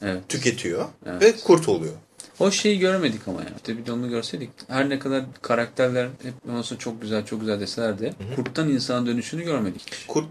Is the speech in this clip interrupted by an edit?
no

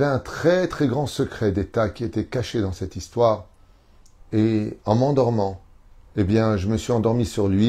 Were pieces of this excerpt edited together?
yes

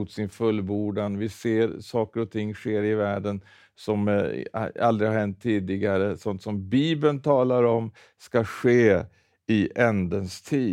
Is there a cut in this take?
no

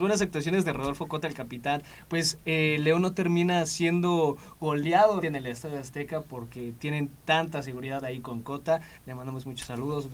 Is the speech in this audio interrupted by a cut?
yes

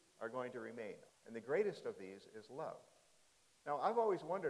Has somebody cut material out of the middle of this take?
yes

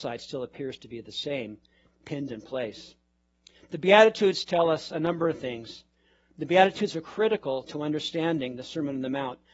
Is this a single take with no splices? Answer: yes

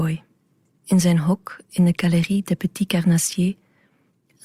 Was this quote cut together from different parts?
no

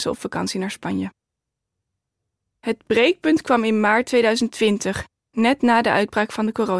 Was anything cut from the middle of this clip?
no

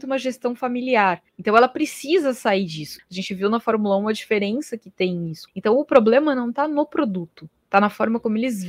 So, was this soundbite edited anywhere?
yes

